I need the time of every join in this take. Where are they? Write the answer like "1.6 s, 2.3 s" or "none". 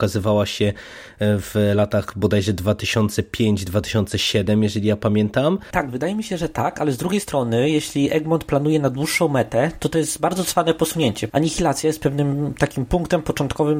5.7 s, 11.3 s